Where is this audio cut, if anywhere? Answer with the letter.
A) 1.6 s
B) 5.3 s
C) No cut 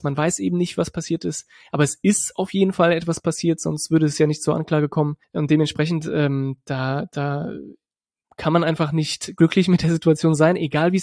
C